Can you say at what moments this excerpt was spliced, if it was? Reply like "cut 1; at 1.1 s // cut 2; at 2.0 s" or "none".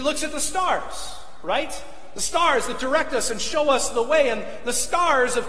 none